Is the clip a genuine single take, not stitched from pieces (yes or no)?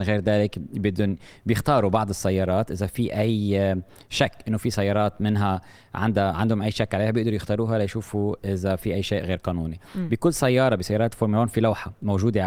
yes